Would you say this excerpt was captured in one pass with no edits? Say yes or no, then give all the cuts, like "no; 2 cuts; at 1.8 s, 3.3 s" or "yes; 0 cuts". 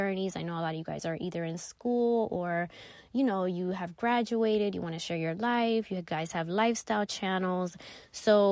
yes; 0 cuts